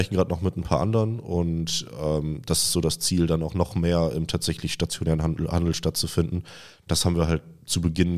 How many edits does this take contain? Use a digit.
0